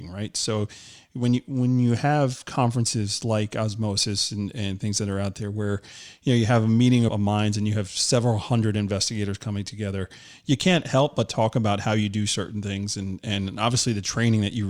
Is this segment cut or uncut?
cut